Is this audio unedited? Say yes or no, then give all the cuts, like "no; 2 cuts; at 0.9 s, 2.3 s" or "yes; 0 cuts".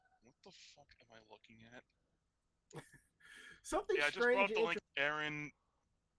no; 1 cut; at 4.8 s